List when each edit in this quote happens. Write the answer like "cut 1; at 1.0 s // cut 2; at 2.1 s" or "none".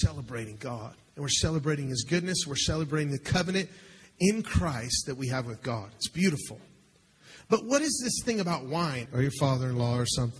cut 1; at 9.1 s